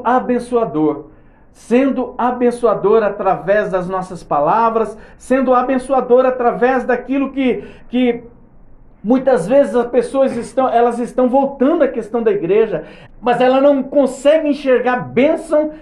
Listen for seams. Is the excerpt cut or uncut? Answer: cut